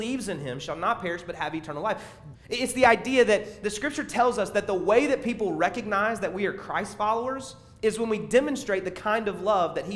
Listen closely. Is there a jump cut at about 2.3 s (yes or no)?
yes